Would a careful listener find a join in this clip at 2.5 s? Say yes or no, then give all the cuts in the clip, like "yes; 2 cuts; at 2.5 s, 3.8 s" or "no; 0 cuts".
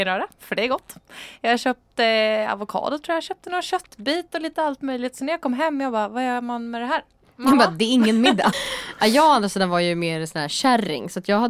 no; 1 cut; at 8.5 s